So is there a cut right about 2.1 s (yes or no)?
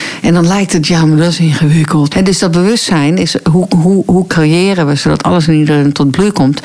yes